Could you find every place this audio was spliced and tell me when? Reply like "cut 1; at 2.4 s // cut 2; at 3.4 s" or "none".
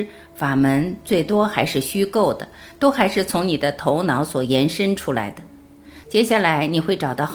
cut 1; at 6.0 s

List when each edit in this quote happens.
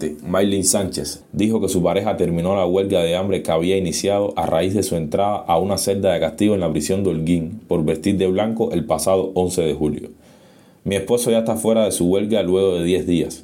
cut 1; at 1.2 s

